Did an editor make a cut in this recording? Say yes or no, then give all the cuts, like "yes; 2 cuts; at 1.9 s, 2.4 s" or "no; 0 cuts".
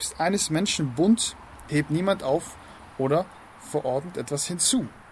yes; 1 cut; at 1.7 s